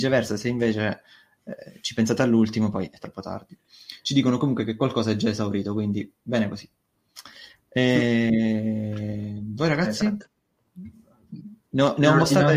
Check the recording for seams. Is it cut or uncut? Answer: uncut